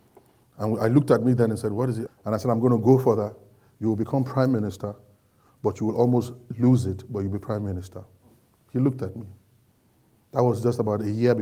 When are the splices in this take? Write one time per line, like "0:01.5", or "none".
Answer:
0:02.1